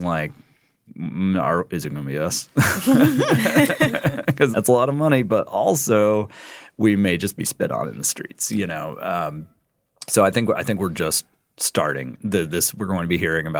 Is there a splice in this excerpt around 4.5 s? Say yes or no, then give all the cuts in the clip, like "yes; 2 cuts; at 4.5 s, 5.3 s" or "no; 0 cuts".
yes; 1 cut; at 4.5 s